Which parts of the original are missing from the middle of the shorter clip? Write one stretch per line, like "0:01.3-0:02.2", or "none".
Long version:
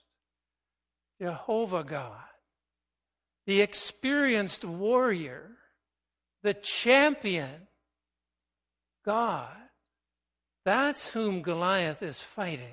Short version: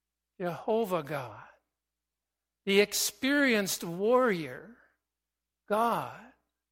0:06.3-0:08.9